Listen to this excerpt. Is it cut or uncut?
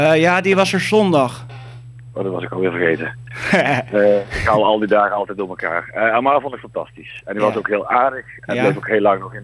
cut